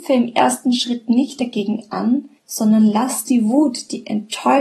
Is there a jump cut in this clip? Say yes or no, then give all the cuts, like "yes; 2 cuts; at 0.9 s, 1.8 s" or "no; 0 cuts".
yes; 1 cut; at 2.4 s